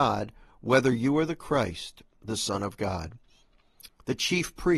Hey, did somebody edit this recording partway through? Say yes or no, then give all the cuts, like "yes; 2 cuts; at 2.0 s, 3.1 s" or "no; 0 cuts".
yes; 1 cut; at 3.9 s